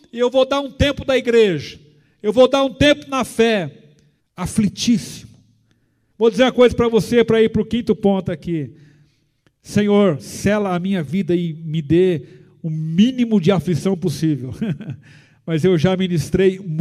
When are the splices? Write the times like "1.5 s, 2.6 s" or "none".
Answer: 4.2 s, 6.1 s